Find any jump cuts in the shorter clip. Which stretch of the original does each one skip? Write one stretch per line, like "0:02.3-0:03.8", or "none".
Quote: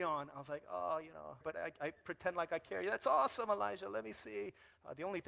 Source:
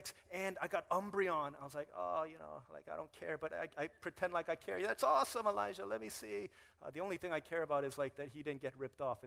0:02.7-0:03.4